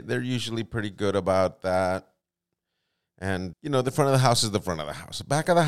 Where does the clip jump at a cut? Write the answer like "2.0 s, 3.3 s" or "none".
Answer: 3.5 s